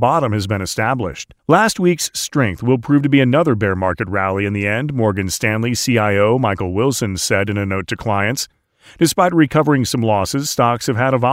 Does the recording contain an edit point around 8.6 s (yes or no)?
no